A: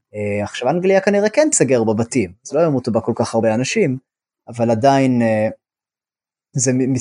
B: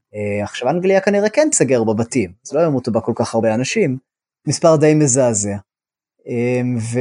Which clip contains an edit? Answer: B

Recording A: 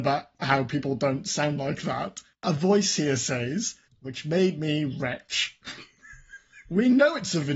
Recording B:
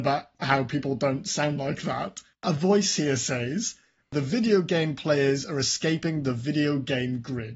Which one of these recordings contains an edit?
A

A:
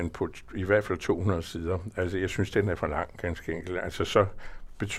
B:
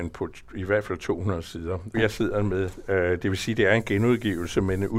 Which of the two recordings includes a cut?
B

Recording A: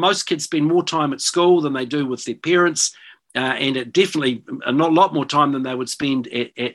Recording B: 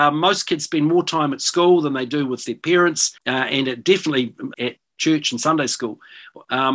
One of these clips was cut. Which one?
B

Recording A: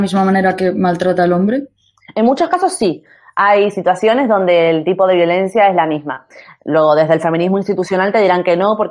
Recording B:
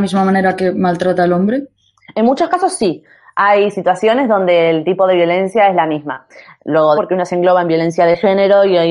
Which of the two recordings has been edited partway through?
B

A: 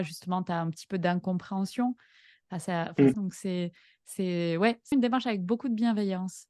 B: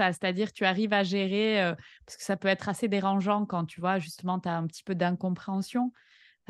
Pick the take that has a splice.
A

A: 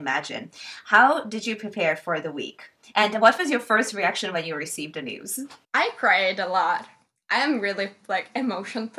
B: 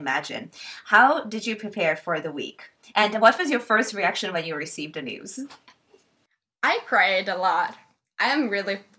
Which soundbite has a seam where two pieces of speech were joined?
A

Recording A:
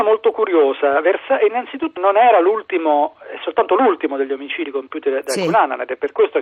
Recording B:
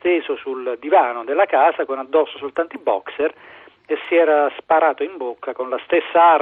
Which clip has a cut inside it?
A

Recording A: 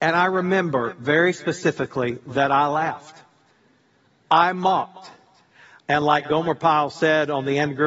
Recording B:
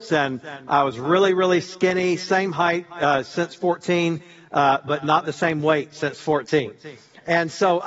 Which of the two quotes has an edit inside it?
A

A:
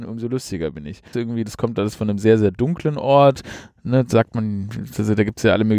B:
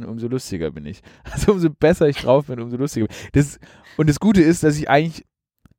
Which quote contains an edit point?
A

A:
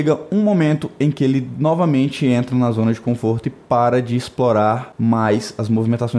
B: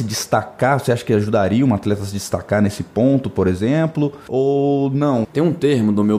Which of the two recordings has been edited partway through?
B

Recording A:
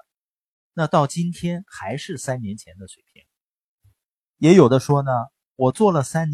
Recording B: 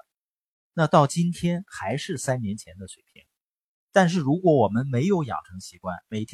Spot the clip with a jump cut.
B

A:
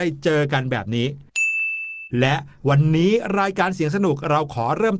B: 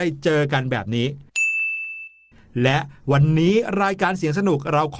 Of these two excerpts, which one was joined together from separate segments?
A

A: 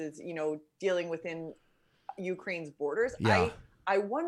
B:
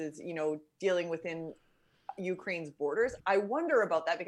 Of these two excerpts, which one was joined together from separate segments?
B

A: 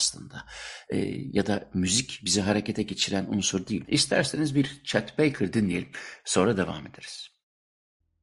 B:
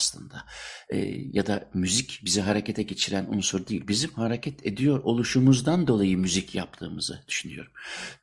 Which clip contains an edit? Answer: A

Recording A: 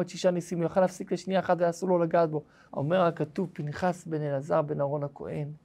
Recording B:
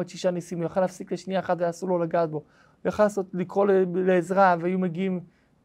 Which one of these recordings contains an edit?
A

